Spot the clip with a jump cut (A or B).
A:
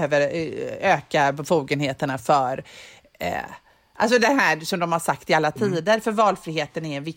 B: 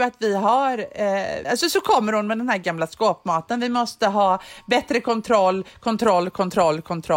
B